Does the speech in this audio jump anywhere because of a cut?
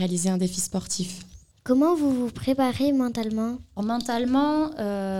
yes; 1 cut; at 3.8 s

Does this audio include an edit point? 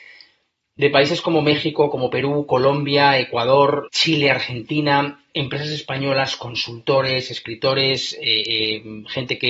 yes; 1 cut; at 3.9 s

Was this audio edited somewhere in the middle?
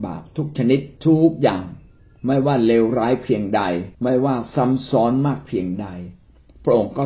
yes; 2 cuts; at 1.0 s, 3.9 s

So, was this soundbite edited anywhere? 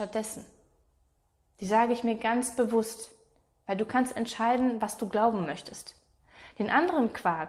no; 0 cuts

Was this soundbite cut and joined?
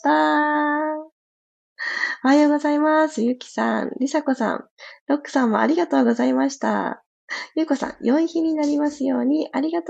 no; 0 cuts

